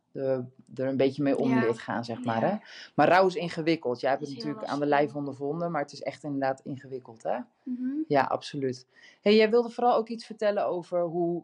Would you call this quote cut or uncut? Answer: uncut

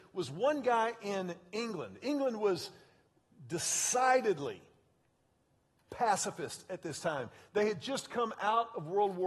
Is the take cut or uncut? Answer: uncut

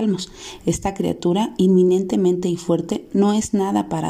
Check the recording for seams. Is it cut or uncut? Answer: uncut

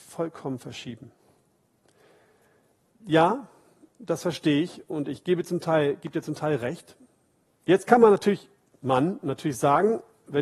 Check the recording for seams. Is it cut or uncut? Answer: cut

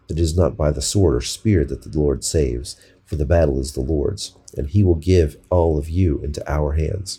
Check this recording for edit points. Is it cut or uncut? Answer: uncut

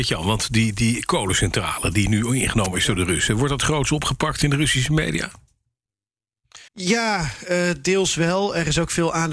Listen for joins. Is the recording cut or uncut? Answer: cut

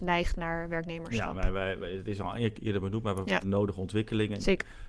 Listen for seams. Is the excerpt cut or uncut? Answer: cut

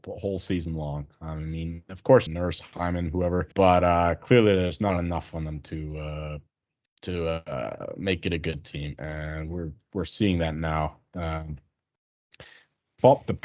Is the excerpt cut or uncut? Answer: cut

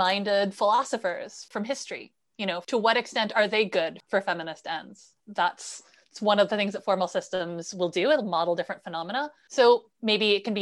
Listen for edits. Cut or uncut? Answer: cut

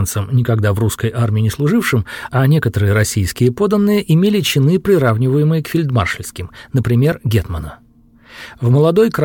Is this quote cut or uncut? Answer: uncut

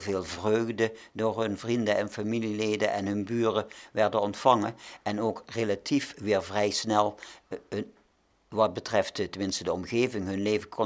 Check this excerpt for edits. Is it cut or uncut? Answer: uncut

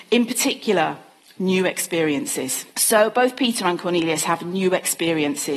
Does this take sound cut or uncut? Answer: cut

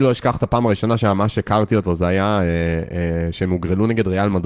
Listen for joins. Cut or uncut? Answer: uncut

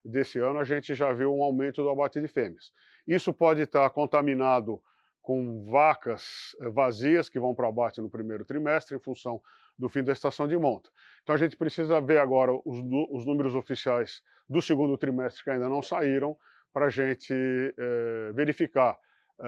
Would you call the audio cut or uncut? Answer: uncut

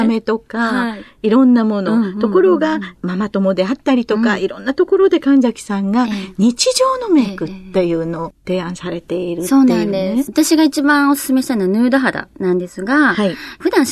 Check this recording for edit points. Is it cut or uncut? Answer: uncut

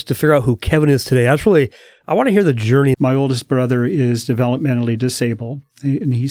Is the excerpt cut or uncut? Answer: cut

